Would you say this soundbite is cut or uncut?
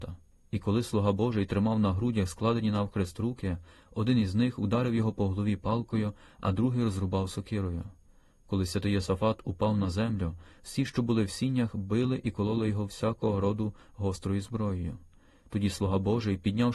uncut